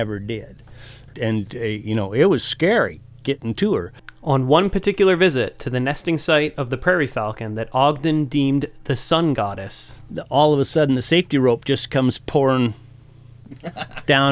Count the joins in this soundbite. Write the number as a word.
one